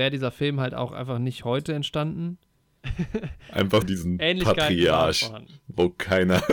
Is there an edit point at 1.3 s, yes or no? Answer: no